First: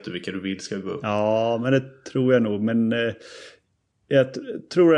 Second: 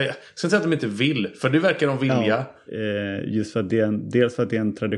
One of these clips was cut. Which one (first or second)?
second